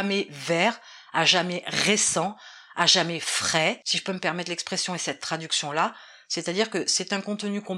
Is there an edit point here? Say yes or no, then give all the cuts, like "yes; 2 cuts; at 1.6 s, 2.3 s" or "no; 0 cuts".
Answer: no; 0 cuts